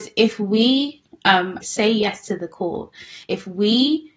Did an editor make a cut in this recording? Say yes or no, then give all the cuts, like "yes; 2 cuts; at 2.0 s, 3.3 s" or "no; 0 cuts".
yes; 2 cuts; at 1.6 s, 3.2 s